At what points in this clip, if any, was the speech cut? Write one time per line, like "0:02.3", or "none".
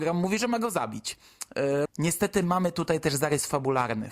0:01.9